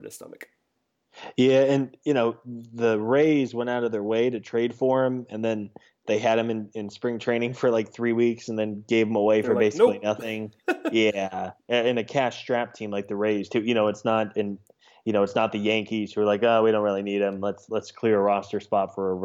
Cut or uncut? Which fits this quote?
uncut